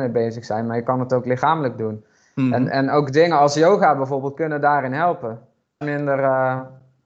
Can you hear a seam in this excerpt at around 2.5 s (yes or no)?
no